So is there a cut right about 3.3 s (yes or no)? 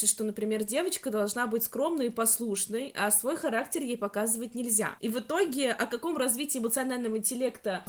no